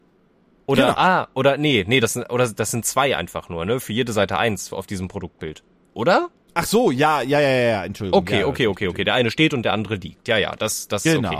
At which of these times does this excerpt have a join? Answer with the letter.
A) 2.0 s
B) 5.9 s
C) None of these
C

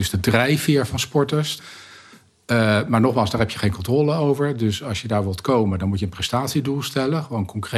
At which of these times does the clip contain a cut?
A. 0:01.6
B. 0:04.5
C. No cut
A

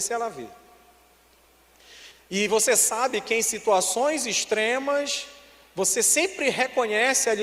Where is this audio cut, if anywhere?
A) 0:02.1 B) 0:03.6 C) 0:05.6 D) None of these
A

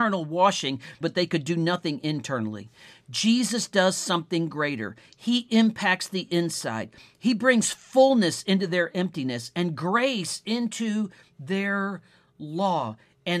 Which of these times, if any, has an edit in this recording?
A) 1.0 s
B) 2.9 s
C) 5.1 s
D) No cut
A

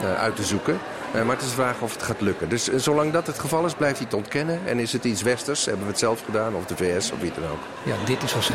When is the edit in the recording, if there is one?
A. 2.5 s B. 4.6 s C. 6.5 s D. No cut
D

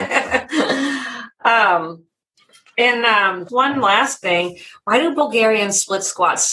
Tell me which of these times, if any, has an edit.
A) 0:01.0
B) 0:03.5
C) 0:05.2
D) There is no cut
B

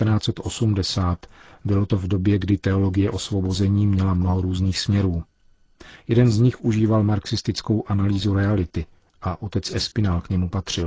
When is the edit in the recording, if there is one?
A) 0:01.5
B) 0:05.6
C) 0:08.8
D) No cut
D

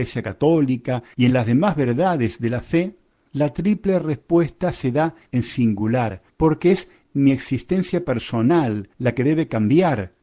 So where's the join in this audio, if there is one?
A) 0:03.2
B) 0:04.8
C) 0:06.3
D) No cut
C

